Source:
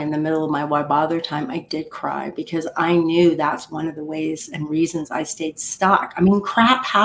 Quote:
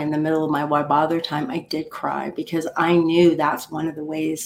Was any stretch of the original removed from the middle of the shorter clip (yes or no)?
no